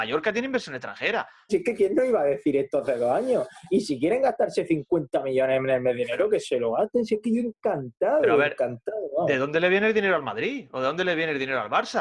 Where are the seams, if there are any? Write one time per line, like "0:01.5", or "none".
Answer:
0:01.5